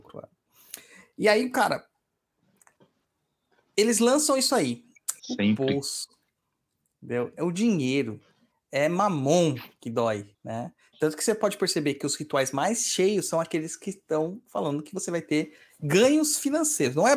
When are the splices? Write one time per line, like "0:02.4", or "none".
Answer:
0:05.2
0:10.3